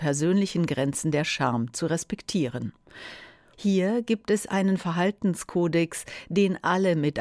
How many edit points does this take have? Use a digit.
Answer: 1